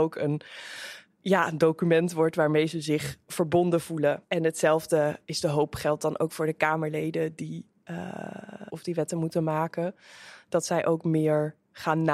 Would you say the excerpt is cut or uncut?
cut